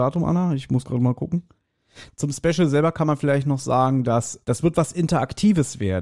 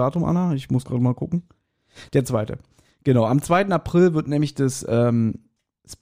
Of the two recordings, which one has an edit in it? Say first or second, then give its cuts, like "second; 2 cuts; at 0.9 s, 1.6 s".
first; 2 cuts; at 2.1 s, 4.4 s